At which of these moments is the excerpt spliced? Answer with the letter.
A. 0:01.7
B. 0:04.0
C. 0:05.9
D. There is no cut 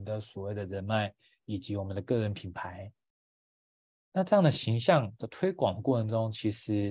D